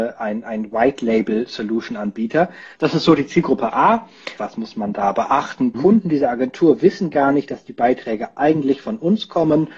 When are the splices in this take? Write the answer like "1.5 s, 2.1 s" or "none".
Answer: 2.8 s, 4.4 s, 5.7 s